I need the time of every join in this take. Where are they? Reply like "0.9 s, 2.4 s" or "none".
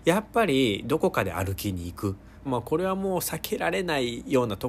2.4 s